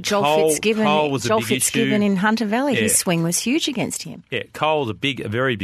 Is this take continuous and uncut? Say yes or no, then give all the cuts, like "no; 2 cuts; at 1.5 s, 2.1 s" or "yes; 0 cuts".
yes; 0 cuts